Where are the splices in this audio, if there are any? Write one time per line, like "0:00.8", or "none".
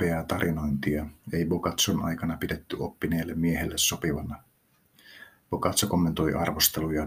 none